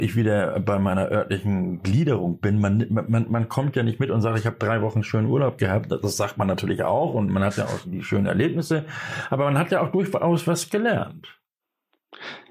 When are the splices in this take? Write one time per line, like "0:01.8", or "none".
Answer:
0:07.8